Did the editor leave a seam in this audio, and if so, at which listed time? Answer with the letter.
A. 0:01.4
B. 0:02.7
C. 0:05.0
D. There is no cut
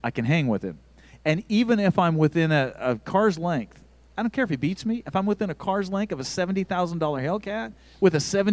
D